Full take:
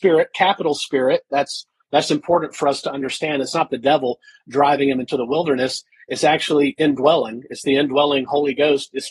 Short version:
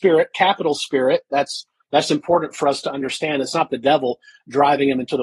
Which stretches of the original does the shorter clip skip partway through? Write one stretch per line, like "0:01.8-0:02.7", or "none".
none